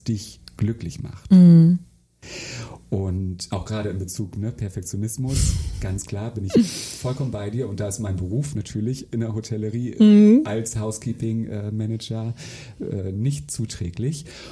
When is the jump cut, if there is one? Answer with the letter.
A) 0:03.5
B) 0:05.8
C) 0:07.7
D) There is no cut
A